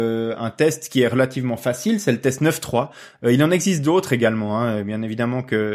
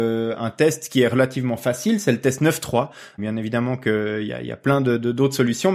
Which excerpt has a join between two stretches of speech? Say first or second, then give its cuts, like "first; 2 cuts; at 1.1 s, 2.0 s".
second; 1 cut; at 3.2 s